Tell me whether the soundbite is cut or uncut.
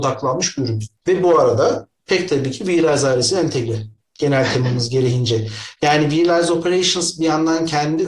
uncut